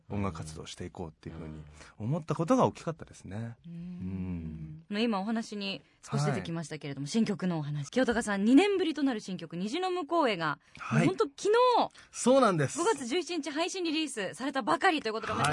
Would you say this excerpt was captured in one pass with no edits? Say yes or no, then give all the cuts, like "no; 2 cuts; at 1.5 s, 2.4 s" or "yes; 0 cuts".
no; 2 cuts; at 4.9 s, 7.9 s